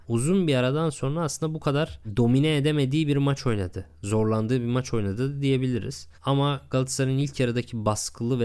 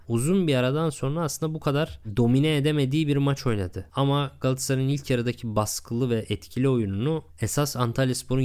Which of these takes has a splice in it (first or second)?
second